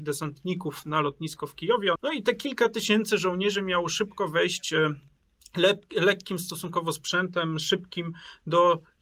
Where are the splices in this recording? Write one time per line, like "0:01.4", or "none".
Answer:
0:02.0